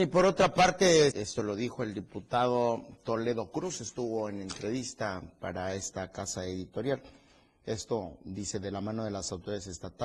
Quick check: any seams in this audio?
yes; 1 cut; at 1.1 s

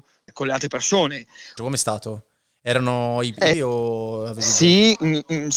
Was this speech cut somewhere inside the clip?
yes; 2 cuts; at 1.6 s, 3.5 s

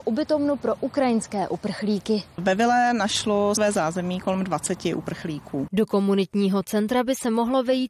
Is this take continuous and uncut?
no; 2 cuts; at 3.6 s, 5.7 s

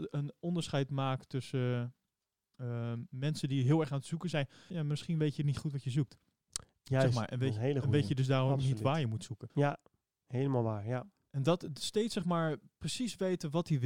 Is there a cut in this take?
yes; 2 cuts; at 4.7 s, 9.5 s

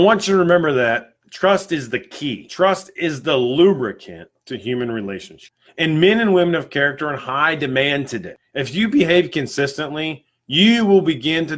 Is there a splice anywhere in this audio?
no; 0 cuts

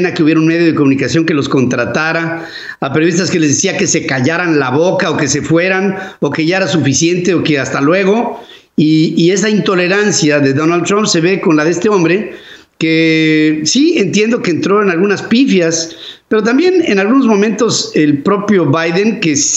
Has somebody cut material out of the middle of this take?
no; 0 cuts

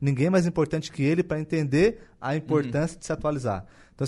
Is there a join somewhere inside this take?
no; 0 cuts

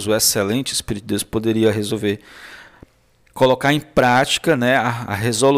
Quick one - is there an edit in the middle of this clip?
no; 0 cuts

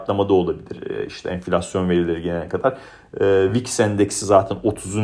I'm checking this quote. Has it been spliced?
no; 0 cuts

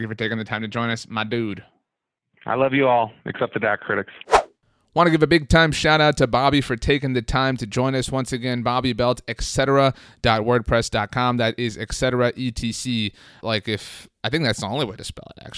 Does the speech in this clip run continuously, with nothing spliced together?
no; 1 cut; at 13.4 s

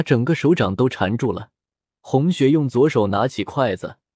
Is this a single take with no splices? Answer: no; 1 cut; at 2.0 s

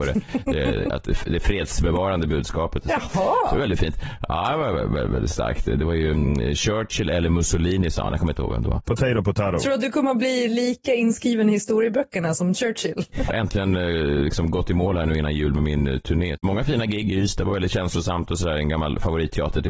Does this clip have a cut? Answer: yes; 1 cut; at 13.3 s

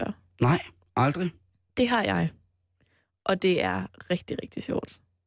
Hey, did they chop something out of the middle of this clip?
no; 0 cuts

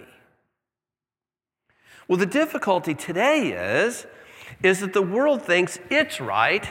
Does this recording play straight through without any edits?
yes; 0 cuts

